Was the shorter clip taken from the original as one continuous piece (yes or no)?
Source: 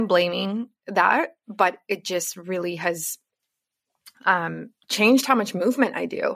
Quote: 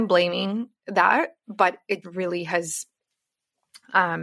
no